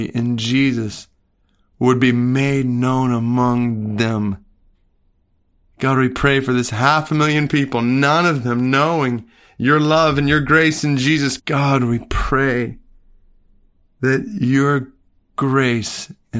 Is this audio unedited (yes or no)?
no